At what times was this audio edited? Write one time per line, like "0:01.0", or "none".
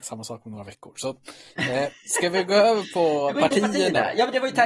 none

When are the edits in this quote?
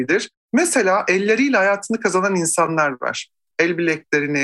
0:03.5

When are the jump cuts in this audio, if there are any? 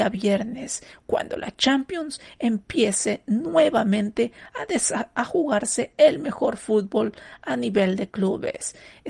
none

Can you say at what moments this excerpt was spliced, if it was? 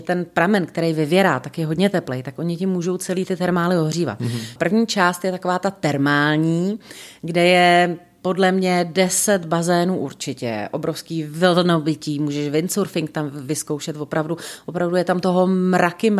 0:04.6

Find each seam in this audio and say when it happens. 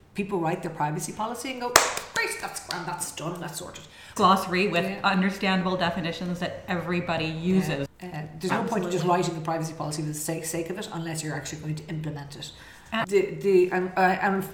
0:04.2
0:07.9
0:13.0

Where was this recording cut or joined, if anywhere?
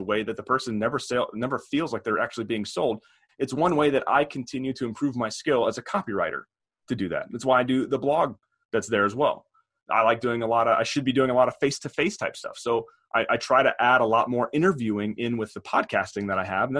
0:03.3

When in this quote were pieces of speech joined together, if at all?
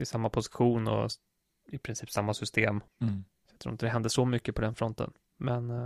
0:02.9

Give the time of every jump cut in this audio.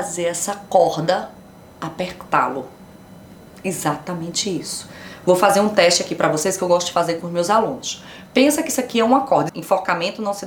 0:09.5

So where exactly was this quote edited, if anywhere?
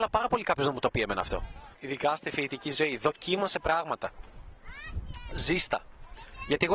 0:01.7

